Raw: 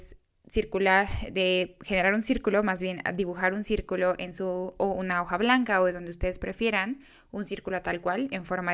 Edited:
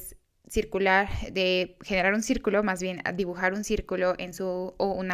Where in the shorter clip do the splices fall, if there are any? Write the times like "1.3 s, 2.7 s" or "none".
none